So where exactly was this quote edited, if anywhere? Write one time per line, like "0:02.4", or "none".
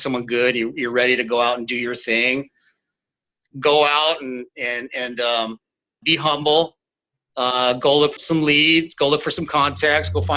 0:06.0
0:08.2